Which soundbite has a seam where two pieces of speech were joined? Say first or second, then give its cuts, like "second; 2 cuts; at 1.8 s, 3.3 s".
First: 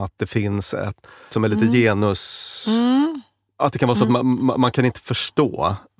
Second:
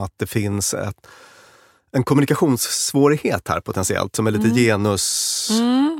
first; 1 cut; at 1.3 s